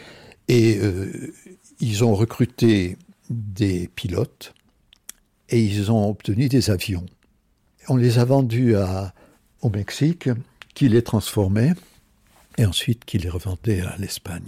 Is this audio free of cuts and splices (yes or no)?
yes